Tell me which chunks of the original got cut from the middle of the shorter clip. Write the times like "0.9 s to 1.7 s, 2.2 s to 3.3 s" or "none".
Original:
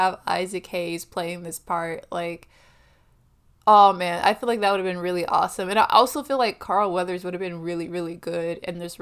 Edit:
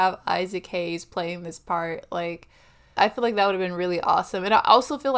3.0 s to 4.2 s